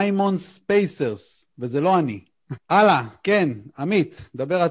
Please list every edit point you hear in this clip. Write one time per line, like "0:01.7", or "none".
0:02.6